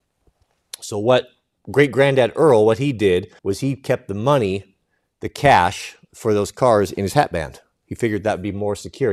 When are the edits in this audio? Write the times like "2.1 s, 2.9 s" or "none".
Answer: 1.6 s, 3.4 s